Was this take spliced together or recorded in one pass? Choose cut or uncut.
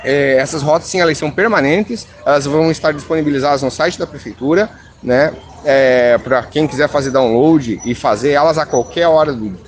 uncut